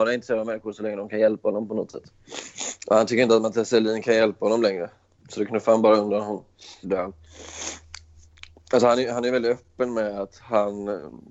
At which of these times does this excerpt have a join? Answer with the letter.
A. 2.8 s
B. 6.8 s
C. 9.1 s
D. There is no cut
B